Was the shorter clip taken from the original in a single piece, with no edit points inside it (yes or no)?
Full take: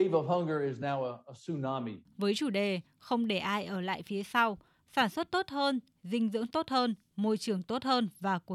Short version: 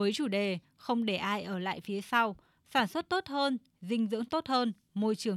yes